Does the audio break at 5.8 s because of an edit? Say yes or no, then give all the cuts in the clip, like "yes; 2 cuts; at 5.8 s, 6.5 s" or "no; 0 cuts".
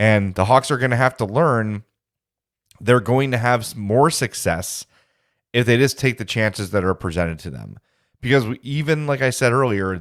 no; 0 cuts